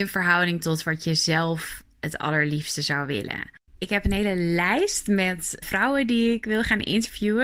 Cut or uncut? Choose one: cut